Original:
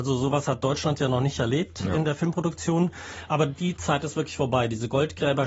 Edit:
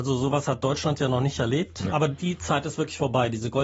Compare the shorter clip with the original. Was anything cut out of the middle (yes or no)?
yes